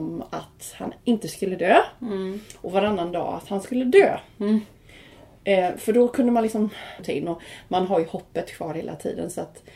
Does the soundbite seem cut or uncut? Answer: cut